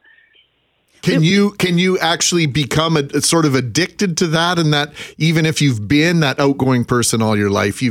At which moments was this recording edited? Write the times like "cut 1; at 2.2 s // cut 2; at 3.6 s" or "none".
none